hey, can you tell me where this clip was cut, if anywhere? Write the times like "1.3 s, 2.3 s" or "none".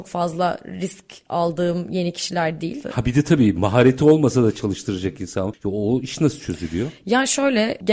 2.8 s